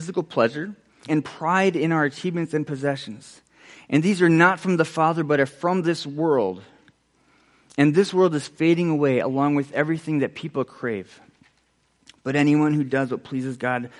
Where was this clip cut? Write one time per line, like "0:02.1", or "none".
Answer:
0:01.1